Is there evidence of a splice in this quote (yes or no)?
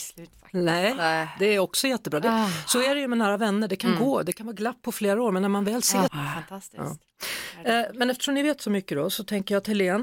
yes